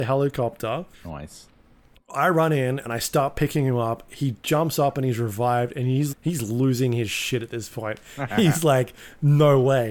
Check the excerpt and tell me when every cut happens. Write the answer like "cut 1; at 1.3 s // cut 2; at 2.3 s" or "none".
cut 1; at 0.9 s // cut 2; at 6.1 s